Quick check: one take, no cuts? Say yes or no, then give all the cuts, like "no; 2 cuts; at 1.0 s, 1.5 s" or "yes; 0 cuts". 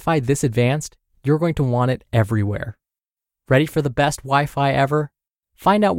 yes; 0 cuts